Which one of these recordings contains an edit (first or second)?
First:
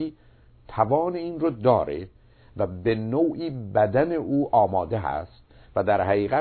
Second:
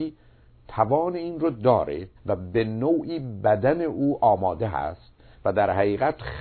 second